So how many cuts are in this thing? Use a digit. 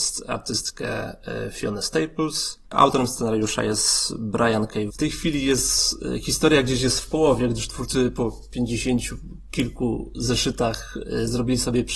2